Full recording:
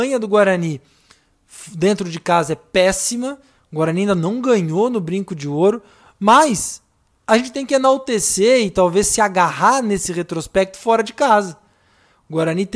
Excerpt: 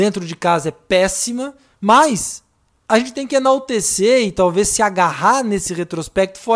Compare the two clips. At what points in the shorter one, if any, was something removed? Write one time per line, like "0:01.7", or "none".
0:01.7

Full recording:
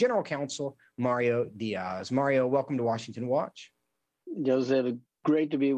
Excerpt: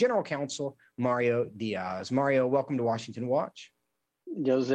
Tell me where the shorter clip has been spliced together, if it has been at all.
none

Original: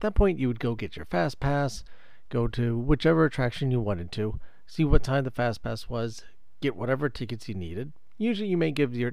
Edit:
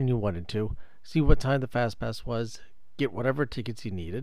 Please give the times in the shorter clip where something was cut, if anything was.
none

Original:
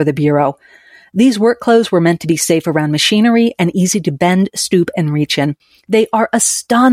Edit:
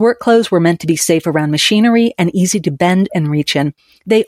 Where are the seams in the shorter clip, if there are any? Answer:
0:03.1

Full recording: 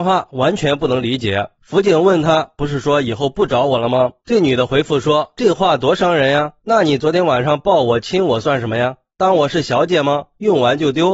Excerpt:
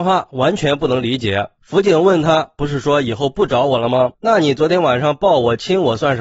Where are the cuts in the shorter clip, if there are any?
0:04.1

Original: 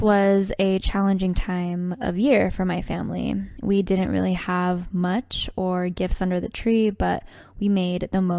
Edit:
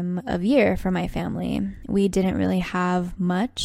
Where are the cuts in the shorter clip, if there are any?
none

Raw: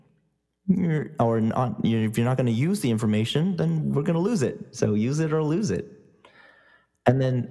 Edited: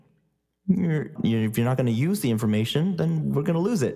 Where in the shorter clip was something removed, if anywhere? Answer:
0:01.2

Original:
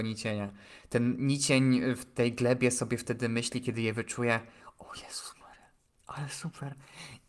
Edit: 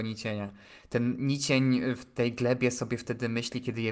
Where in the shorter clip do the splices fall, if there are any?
none

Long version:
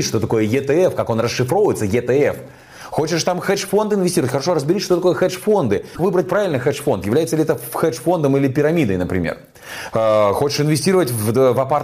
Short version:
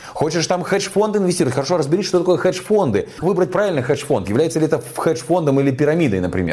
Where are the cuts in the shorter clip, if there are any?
none

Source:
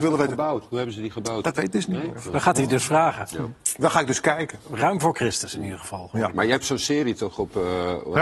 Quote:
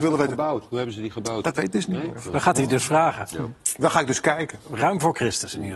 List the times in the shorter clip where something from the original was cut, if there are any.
none

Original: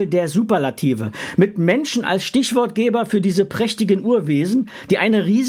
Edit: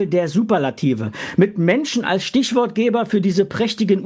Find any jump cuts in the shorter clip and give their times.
none

